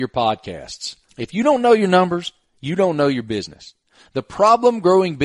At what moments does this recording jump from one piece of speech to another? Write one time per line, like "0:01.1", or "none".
0:01.1